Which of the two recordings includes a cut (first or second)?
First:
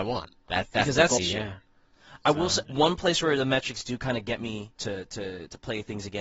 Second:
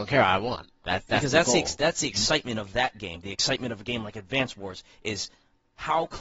first